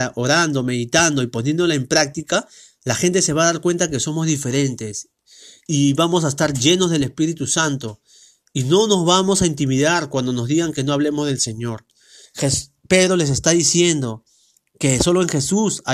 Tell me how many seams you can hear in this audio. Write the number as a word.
two